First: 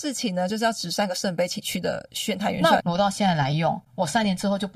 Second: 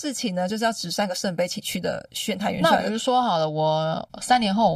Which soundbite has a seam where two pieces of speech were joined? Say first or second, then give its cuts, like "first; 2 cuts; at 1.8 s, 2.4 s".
first; 1 cut; at 2.8 s